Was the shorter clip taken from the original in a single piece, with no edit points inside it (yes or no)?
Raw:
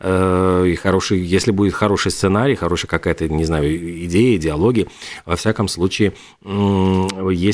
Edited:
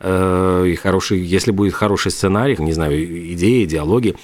no